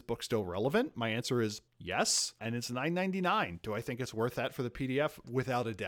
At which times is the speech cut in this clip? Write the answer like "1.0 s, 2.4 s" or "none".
1.7 s